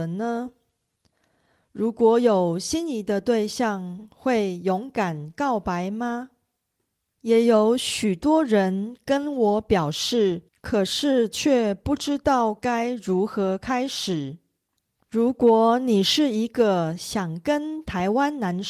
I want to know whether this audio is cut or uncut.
cut